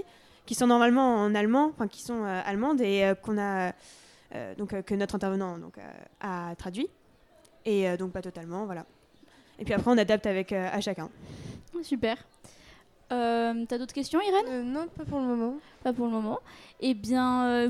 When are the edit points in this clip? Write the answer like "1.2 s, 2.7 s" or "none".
none